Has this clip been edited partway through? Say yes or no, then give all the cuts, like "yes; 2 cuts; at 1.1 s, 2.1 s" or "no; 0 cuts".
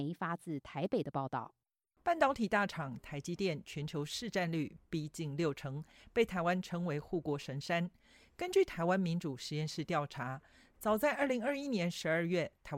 yes; 1 cut; at 2.0 s